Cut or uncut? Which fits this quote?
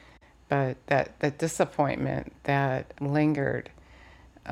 cut